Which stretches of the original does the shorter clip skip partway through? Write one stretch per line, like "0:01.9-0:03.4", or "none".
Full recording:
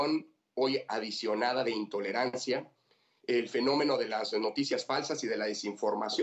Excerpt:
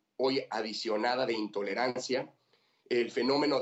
none